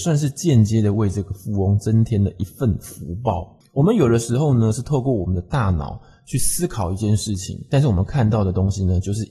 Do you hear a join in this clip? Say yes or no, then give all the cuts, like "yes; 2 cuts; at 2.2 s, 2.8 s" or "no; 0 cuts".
yes; 1 cut; at 3.6 s